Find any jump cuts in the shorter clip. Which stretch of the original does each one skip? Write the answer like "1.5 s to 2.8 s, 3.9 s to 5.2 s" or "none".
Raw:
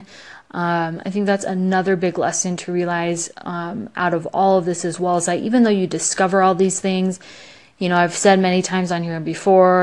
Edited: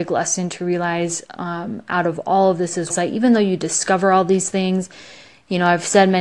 5.0 s to 5.2 s

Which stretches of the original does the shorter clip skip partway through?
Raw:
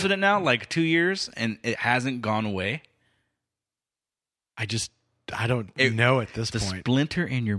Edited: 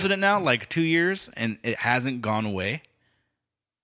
none

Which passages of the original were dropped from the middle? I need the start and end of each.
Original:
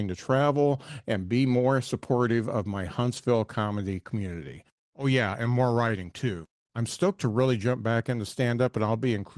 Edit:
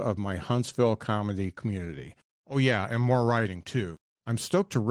none

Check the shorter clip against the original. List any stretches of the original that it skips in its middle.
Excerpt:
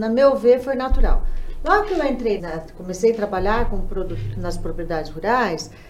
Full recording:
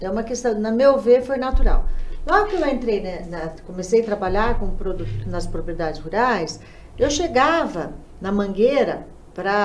3.0 s to 3.3 s

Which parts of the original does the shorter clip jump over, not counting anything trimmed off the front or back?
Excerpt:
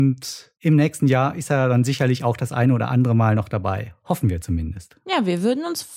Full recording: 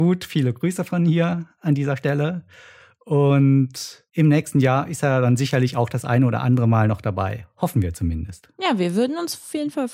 none

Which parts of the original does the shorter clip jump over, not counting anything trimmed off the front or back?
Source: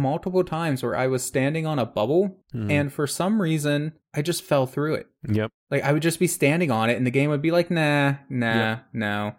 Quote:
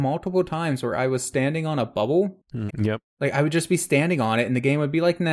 2.7 s to 5.2 s

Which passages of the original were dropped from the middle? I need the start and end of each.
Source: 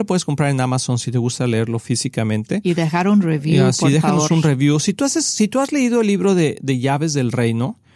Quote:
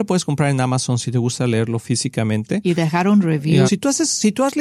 3.7 s to 4.8 s

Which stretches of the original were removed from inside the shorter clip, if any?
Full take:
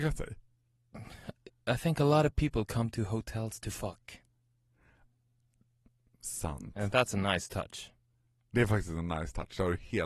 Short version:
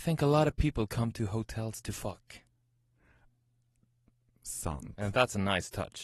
none

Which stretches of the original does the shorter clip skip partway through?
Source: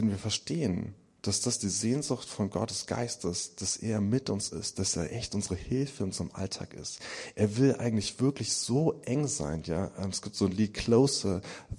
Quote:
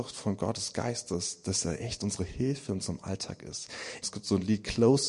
3.6 s to 4.7 s, 7.3 s to 10.1 s

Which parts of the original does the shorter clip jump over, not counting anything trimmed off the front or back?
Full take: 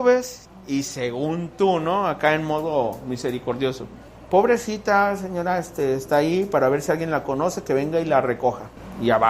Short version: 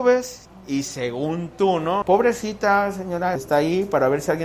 2.0 s to 4.3 s, 5.6 s to 6.0 s

